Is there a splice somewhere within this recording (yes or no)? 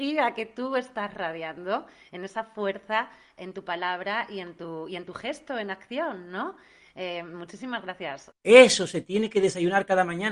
yes